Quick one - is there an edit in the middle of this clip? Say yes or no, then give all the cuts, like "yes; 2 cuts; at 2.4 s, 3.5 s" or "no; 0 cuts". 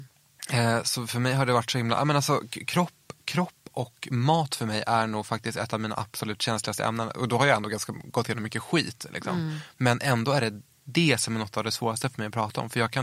no; 0 cuts